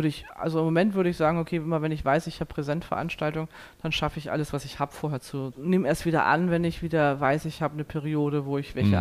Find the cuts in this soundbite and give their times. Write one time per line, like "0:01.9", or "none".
0:05.5